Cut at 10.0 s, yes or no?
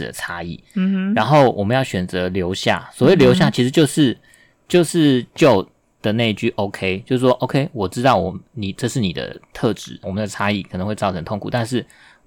yes